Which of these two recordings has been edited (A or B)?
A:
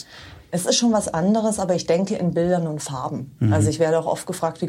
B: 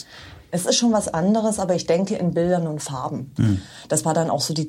B